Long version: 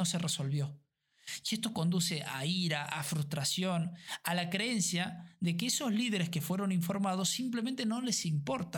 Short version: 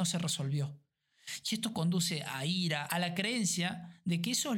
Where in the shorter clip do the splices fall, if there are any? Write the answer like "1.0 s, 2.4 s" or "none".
2.9 s